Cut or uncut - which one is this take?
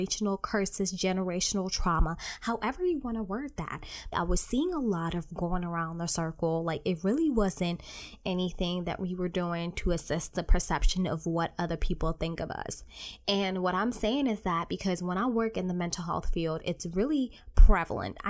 cut